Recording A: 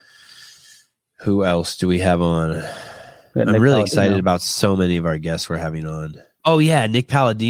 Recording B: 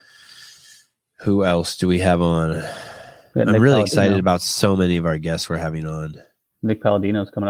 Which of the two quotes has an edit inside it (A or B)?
A